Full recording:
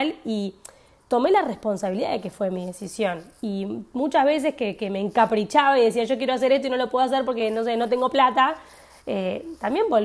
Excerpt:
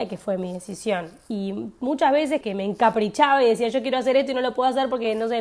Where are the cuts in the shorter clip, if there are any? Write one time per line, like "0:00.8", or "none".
0:02.4

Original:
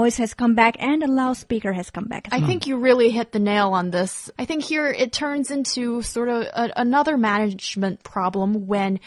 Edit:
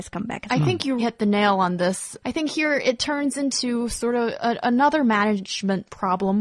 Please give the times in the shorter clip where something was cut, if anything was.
0:01.0

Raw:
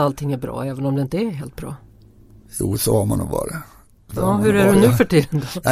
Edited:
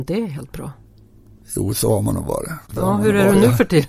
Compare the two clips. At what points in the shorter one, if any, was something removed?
0:02.7

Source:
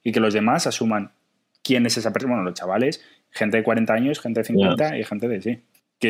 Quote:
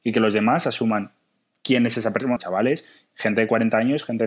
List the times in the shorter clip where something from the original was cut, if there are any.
0:02.4

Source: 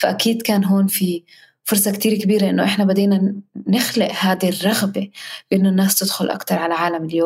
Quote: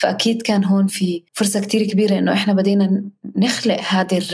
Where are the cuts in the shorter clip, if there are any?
0:01.3

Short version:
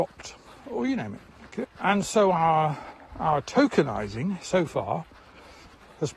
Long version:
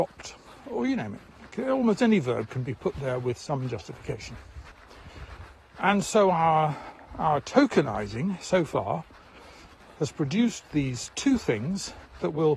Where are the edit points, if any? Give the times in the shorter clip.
0:01.6

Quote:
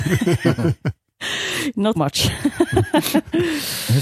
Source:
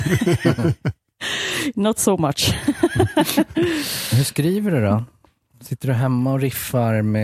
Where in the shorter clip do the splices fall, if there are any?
0:01.9

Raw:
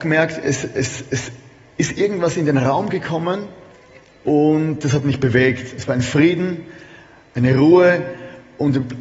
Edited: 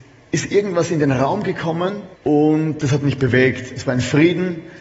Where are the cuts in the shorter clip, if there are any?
0:02.1

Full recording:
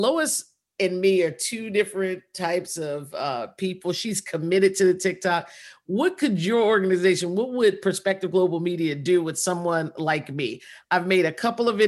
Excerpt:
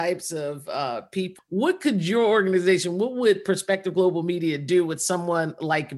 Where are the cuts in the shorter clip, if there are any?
0:01.4

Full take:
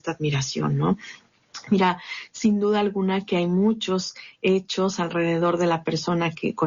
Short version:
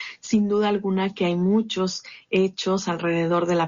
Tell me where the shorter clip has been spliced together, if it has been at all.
none

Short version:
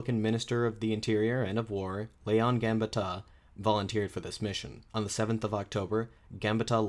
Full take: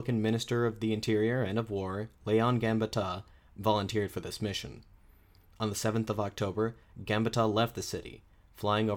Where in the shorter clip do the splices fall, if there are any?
0:04.9

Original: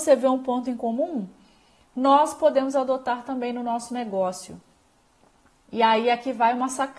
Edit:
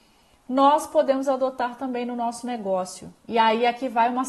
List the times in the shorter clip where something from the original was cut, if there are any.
0:03.2

